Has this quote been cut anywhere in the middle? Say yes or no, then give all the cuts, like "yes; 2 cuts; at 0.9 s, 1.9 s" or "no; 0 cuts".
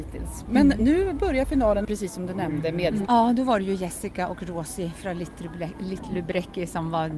yes; 2 cuts; at 1.8 s, 3.1 s